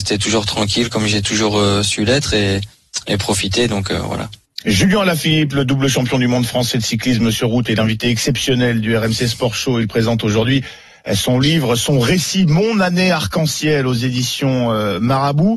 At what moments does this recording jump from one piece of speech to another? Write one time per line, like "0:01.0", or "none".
none